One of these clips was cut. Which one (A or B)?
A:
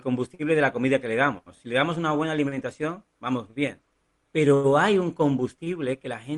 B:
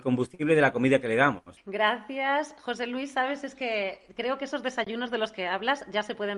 B